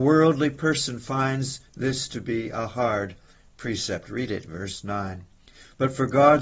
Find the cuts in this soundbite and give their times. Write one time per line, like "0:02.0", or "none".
none